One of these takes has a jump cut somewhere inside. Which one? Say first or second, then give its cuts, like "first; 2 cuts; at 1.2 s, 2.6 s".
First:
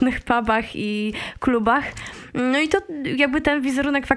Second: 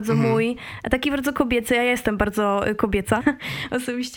second; 1 cut; at 3.2 s